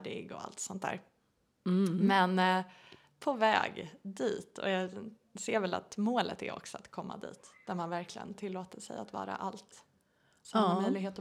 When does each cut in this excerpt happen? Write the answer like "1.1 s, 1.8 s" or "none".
none